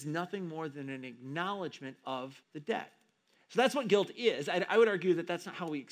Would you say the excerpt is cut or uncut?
cut